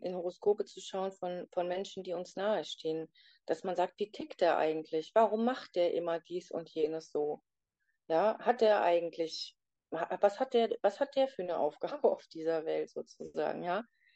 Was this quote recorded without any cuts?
yes; 0 cuts

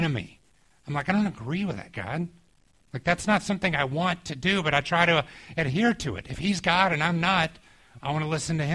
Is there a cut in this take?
no; 0 cuts

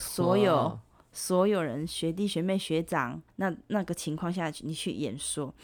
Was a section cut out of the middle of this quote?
yes; 1 cut; at 3.3 s

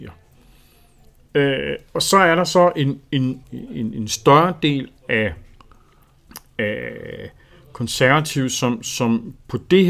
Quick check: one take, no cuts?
no; 1 cut; at 3.4 s

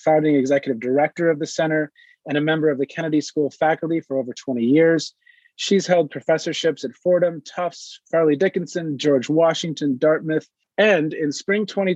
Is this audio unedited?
yes; 0 cuts

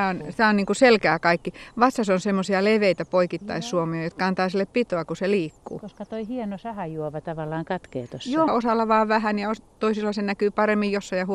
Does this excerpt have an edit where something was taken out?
yes; 1 cut; at 8.5 s

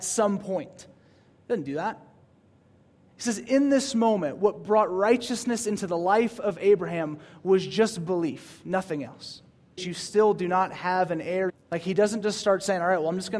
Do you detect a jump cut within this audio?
yes; 2 cuts; at 9.8 s, 11.5 s

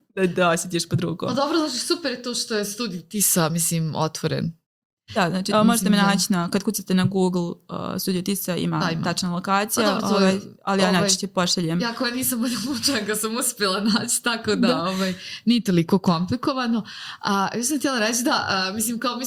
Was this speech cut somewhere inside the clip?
yes; 1 cut; at 5.5 s

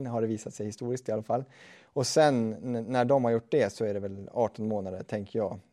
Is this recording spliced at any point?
no; 0 cuts

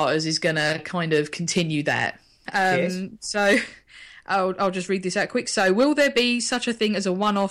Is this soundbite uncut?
no; 1 cut; at 2.5 s

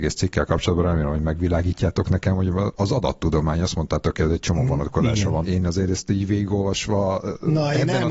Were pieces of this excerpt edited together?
yes; 1 cut; at 5.4 s

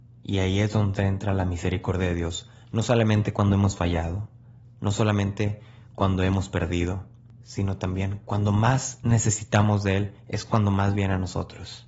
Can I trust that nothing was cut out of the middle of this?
yes; 0 cuts

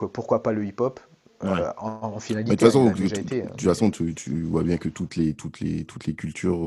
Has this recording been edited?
no; 0 cuts

